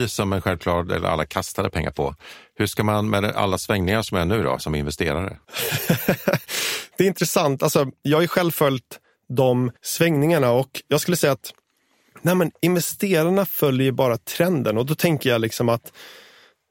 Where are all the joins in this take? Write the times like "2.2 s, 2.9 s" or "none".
4.6 s